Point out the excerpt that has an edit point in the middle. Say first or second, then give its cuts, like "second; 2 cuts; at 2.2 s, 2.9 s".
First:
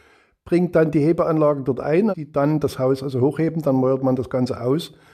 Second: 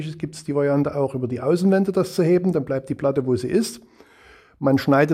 first; 1 cut; at 2.1 s